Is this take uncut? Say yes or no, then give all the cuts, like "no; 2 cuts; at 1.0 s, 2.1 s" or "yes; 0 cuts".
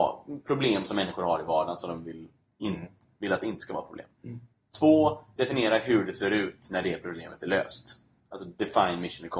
yes; 0 cuts